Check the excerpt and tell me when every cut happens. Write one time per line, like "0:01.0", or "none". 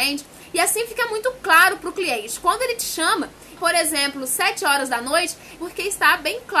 0:03.6
0:05.6

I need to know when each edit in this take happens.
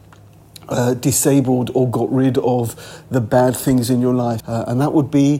0:04.4

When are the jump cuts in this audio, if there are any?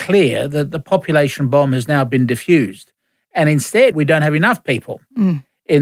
0:03.9

